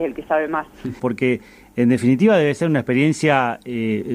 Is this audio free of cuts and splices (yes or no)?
no